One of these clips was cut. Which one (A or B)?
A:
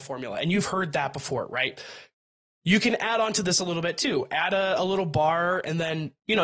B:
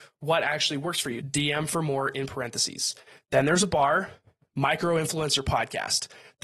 B